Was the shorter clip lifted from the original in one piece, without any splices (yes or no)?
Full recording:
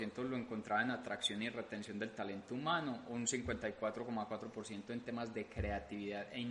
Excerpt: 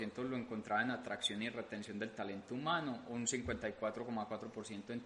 yes